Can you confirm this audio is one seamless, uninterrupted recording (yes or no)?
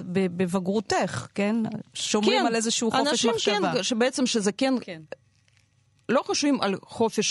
yes